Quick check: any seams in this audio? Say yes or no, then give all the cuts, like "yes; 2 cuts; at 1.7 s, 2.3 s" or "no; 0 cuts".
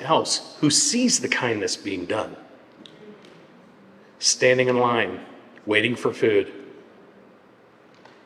no; 0 cuts